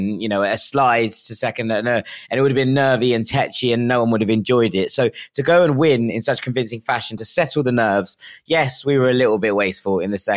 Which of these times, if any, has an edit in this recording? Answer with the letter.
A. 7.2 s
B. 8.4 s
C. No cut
A